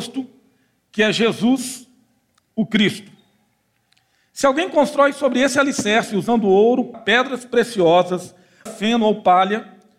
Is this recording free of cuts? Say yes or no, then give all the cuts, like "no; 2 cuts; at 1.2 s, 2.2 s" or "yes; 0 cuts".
no; 2 cuts; at 6.9 s, 8.7 s